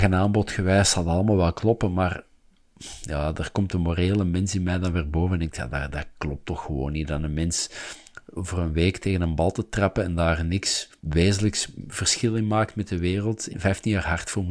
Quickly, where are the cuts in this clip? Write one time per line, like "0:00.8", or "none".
0:11.0
0:13.5